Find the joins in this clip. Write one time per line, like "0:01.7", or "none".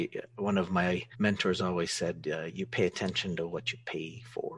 0:01.1